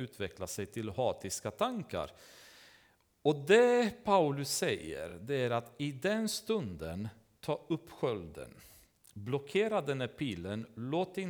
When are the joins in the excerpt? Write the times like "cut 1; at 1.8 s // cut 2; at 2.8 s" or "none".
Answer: none

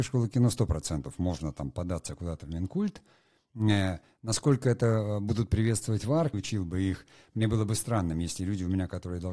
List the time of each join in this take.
cut 1; at 6.3 s

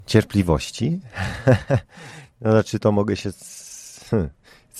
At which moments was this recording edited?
none

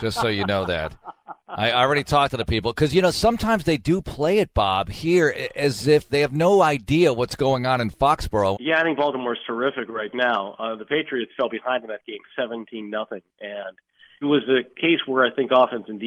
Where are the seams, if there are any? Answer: cut 1; at 6.1 s // cut 2; at 8.5 s // cut 3; at 14.2 s

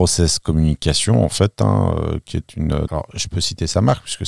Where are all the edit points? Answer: cut 1; at 2.9 s

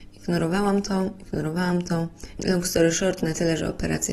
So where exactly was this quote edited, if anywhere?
cut 1; at 2.4 s

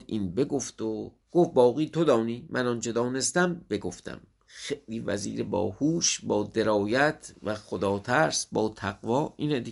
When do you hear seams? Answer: cut 1; at 1.2 s

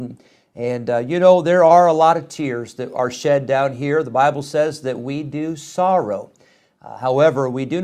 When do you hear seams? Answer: none

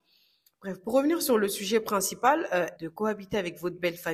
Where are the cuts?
cut 1; at 2.8 s

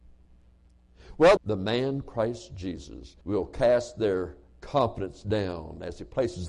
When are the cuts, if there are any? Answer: cut 1; at 1.4 s // cut 2; at 3.2 s

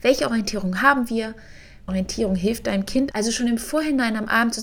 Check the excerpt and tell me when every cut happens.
cut 1; at 1.9 s // cut 2; at 3.1 s

